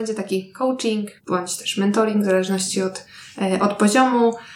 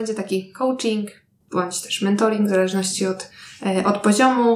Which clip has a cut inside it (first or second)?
first